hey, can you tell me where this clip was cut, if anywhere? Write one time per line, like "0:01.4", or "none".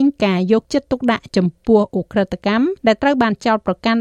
0:02.8